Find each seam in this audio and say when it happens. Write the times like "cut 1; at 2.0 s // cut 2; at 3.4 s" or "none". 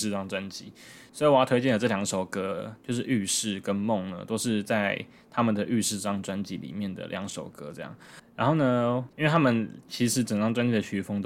cut 1; at 9.1 s